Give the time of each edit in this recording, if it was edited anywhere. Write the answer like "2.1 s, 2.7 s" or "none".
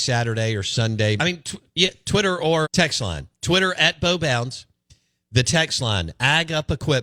1.2 s, 2.6 s